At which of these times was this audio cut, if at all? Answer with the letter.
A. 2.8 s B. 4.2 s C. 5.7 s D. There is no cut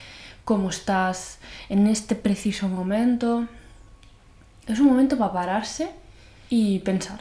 D